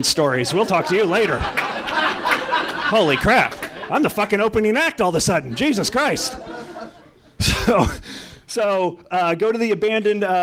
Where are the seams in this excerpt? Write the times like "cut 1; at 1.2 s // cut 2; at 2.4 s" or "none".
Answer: none